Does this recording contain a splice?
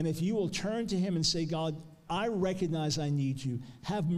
yes; 1 cut; at 2.1 s

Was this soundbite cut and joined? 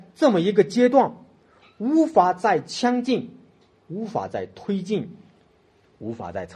no; 0 cuts

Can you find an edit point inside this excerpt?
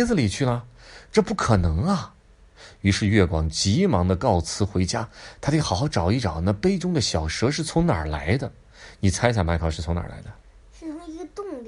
no; 0 cuts

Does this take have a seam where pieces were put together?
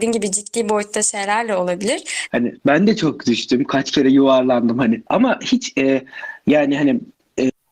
yes; 2 cuts; at 2.3 s, 5.1 s

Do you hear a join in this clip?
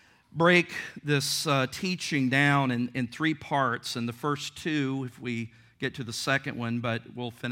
no; 0 cuts

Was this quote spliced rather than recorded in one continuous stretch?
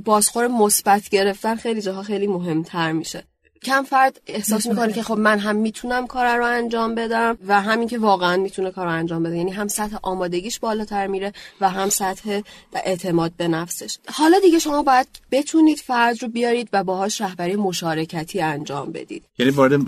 yes; 1 cut; at 3.6 s

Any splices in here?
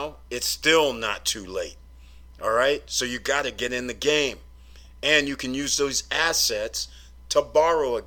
no; 0 cuts

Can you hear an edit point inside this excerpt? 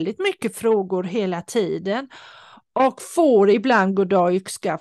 no; 0 cuts

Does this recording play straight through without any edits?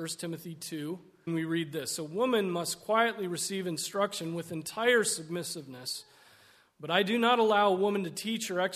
no; 1 cut; at 1.3 s

